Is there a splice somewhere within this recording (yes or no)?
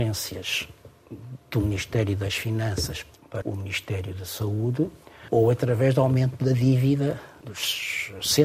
yes